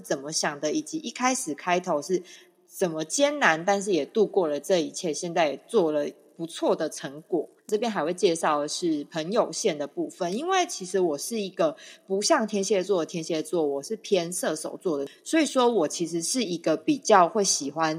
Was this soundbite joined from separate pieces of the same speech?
yes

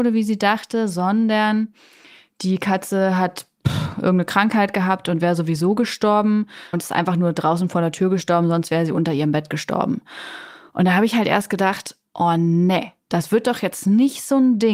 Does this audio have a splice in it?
yes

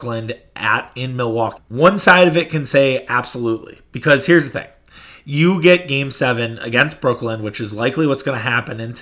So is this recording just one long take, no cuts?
no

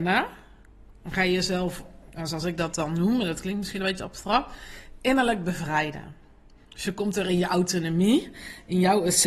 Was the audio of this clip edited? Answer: no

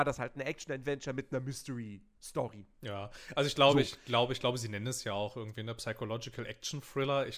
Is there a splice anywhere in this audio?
no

